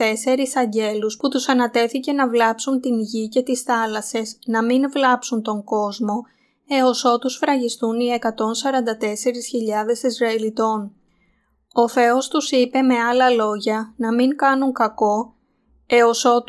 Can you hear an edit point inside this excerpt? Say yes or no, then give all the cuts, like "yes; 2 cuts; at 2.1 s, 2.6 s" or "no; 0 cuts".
no; 0 cuts